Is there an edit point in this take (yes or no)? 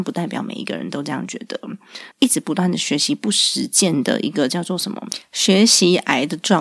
yes